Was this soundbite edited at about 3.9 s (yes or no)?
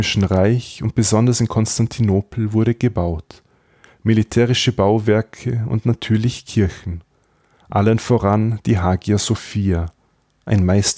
yes